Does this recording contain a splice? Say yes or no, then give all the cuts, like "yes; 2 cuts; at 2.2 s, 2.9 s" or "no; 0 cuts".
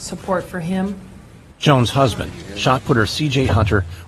no; 0 cuts